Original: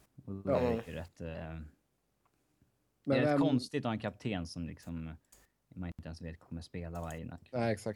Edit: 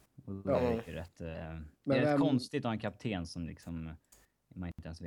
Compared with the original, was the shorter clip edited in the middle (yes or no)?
yes